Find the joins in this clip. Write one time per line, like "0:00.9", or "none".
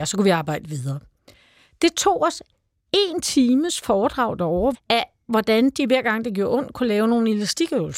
0:04.7